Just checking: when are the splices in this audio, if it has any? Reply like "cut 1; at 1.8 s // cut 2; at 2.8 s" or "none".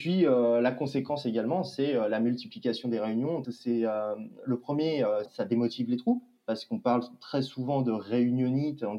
cut 1; at 3.4 s // cut 2; at 5.3 s